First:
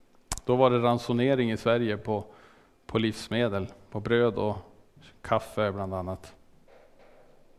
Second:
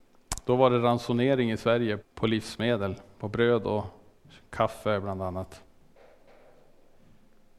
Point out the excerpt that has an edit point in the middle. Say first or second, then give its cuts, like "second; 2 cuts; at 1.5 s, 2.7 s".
second; 1 cut; at 2.0 s